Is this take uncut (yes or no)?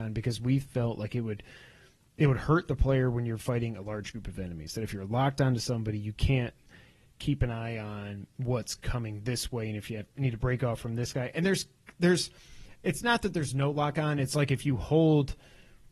yes